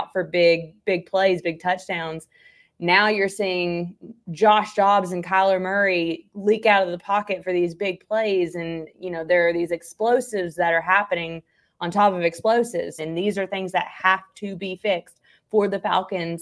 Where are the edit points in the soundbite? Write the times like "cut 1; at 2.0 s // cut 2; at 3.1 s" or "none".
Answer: cut 1; at 13.0 s